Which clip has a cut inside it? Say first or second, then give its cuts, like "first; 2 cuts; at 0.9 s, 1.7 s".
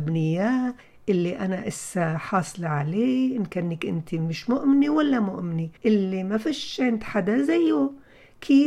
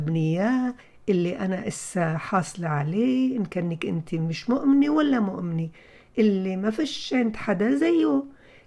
first; 1 cut; at 5.8 s